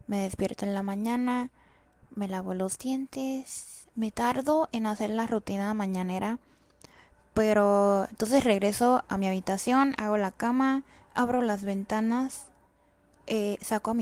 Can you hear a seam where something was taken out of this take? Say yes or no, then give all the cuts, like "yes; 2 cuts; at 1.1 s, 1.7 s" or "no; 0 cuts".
no; 0 cuts